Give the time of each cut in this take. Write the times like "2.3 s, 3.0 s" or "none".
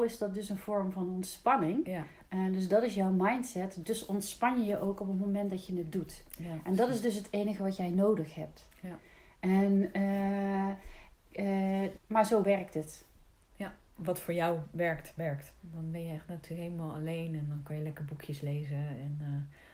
12.0 s, 15.6 s